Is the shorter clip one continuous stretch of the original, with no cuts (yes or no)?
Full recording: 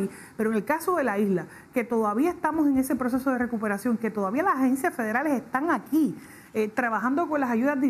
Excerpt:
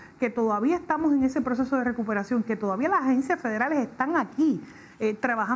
yes